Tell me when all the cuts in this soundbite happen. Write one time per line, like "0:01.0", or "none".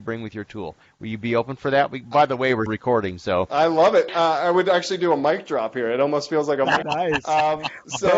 0:02.7
0:04.1
0:06.8